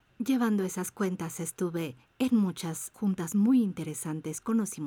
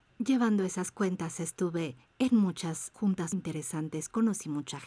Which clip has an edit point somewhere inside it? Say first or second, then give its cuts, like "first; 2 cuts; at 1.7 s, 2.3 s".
second; 1 cut; at 3.3 s